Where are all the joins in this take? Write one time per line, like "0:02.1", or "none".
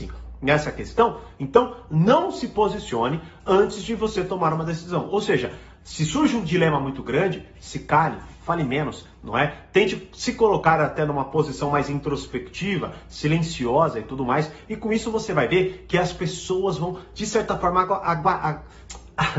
none